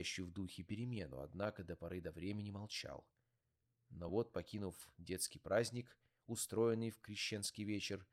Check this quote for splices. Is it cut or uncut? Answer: uncut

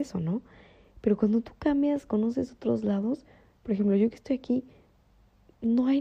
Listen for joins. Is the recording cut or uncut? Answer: uncut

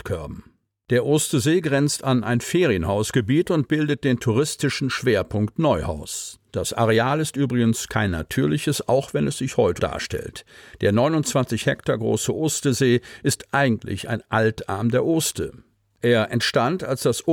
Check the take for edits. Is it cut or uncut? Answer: cut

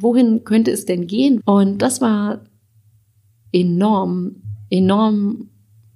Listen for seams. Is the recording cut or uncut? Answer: cut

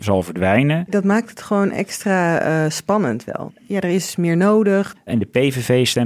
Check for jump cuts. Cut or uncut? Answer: cut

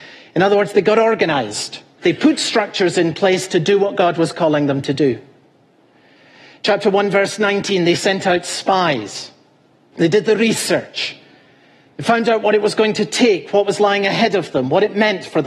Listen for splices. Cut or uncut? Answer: cut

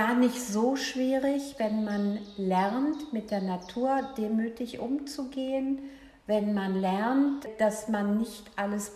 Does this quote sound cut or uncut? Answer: uncut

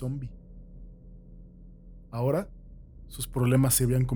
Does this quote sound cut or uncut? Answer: uncut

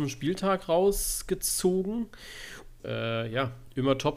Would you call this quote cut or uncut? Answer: cut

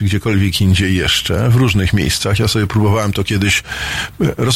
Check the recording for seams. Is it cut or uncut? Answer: uncut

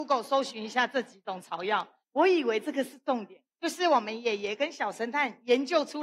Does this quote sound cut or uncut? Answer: cut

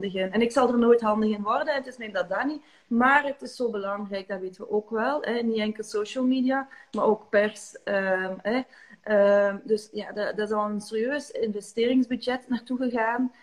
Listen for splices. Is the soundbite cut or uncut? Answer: uncut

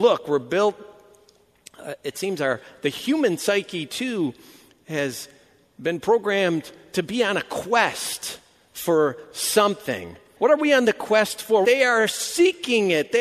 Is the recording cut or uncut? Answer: cut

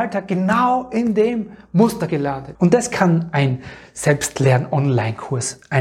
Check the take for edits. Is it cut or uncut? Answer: cut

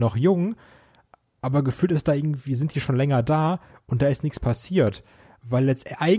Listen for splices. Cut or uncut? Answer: uncut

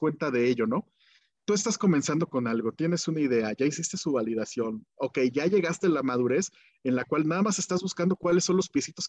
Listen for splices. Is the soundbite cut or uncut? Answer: uncut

